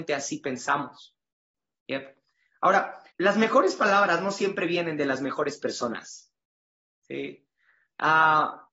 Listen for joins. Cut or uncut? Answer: cut